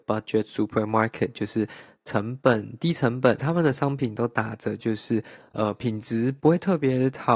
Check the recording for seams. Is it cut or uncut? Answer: cut